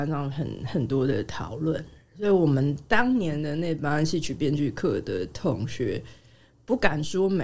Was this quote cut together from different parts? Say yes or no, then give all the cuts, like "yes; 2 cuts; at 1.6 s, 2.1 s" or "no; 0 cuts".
no; 0 cuts